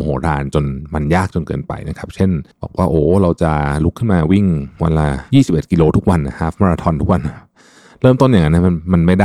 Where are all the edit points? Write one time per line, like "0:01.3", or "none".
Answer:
0:02.5